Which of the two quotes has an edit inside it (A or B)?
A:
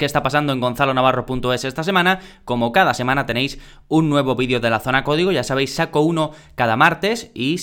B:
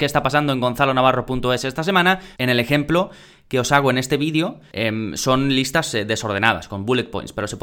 B